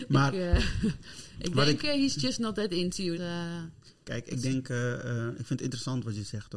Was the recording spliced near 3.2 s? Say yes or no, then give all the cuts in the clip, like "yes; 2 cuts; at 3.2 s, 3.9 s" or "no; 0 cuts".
yes; 1 cut; at 3.2 s